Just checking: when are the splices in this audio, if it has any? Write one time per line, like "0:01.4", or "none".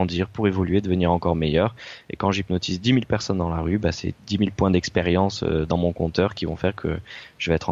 none